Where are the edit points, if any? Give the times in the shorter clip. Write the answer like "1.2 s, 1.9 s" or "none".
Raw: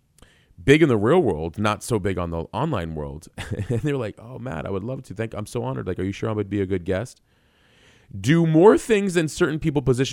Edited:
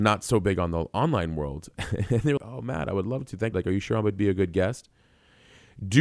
2.4 s, 3.5 s